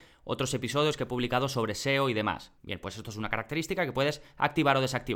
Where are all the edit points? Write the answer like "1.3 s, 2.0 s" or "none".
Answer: 2.6 s